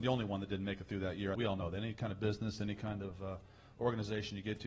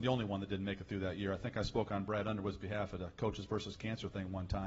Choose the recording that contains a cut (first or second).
first